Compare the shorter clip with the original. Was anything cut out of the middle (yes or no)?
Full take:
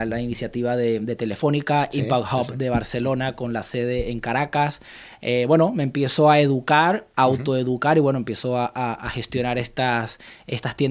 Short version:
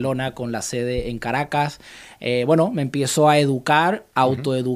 no